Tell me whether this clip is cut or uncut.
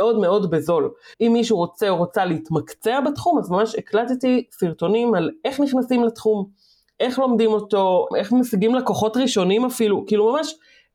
cut